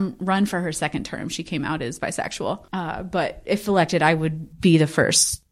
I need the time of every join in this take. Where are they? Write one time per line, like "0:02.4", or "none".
none